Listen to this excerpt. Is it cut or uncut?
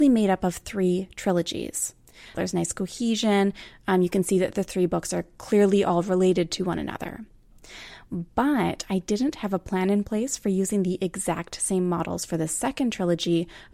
cut